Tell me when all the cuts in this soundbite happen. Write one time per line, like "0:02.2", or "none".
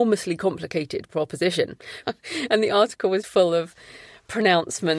0:02.0
0:03.2